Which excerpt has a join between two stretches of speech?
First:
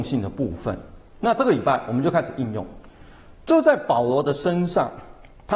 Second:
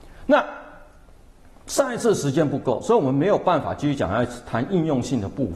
first; 1 cut; at 3.4 s

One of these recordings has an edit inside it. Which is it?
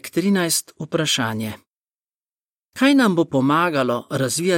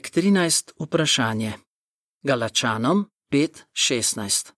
second; 1 cut; at 2.1 s

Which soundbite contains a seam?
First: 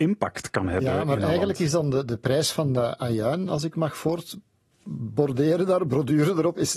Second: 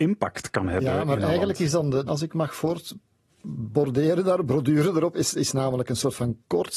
second; 1 cut; at 2.1 s

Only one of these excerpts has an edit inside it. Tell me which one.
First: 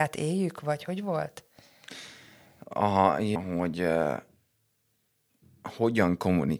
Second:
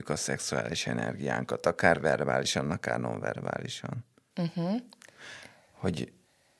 first; 1 cut; at 3.4 s

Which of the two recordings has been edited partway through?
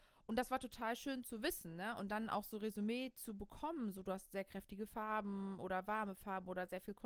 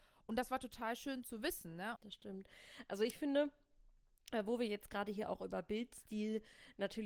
second; 1 cut; at 1.9 s

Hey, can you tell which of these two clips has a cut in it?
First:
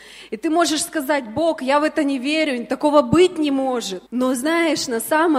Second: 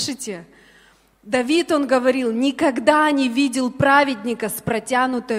first; 1 cut; at 4.1 s

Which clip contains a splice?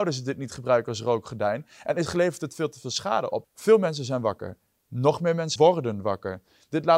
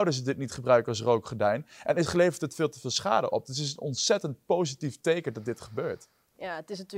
first; 2 cuts; at 3.4 s, 5.6 s

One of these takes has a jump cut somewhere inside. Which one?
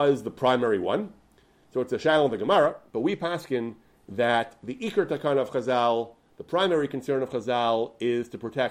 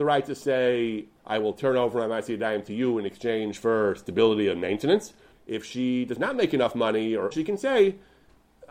second; 3 cuts; at 1.2 s, 5.3 s, 7.3 s

